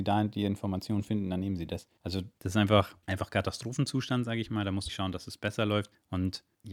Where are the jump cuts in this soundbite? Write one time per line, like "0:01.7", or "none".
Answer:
0:02.4
0:04.9